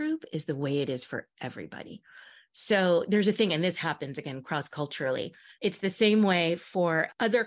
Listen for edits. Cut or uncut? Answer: cut